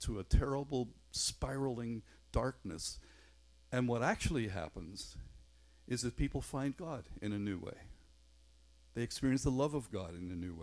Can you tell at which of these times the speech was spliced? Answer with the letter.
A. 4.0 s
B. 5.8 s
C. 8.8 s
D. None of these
D